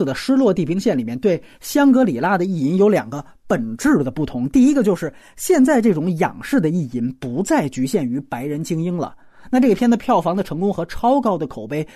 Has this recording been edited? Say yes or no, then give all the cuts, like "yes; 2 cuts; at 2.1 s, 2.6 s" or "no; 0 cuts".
no; 0 cuts